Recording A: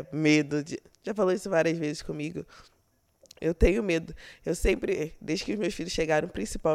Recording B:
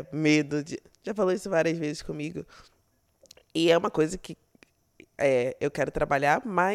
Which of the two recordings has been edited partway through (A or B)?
A